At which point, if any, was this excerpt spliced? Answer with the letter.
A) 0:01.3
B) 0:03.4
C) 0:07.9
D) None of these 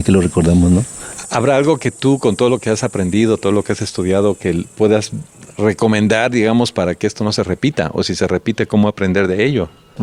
D